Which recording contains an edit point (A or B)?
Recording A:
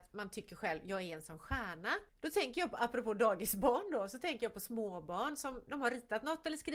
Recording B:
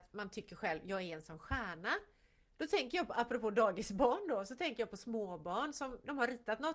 A